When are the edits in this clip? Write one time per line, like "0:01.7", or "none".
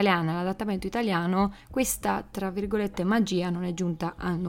none